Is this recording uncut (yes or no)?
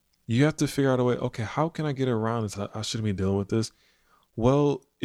no